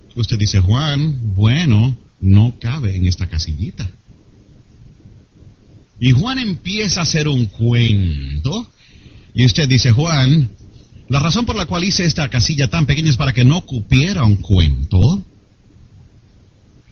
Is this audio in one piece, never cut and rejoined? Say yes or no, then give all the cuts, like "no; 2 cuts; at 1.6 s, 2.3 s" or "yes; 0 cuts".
yes; 0 cuts